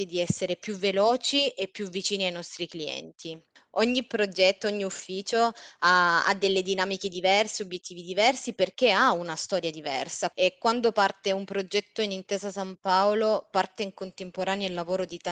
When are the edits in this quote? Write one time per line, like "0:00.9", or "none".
0:10.3